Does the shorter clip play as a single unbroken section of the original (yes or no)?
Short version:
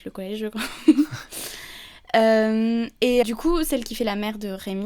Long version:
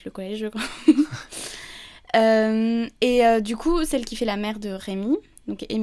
no